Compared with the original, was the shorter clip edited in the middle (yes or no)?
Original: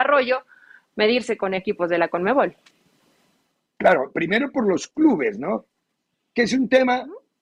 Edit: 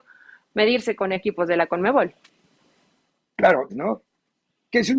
yes